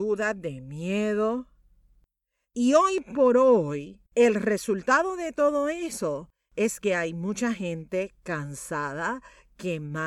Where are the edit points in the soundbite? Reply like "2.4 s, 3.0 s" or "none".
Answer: 4.1 s